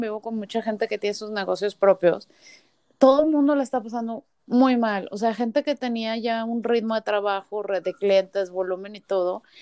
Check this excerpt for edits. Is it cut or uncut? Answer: uncut